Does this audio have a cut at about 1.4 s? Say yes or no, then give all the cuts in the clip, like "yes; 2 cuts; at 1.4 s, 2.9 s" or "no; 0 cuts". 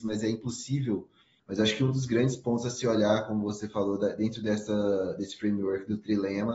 yes; 1 cut; at 1.4 s